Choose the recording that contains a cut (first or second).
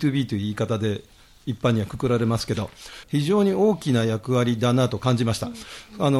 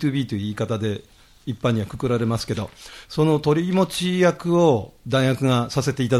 first